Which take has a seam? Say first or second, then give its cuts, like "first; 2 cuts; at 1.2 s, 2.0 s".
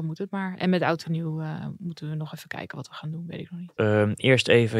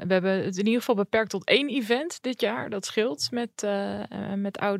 first; 1 cut; at 3.8 s